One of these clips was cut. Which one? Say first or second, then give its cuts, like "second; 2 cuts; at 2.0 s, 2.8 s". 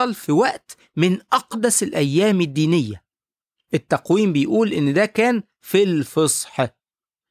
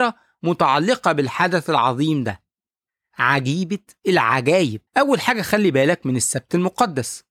second; 1 cut; at 4.9 s